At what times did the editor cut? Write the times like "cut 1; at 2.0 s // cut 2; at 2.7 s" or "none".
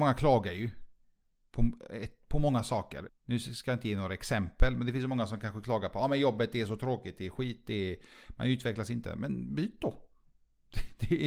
cut 1; at 3.1 s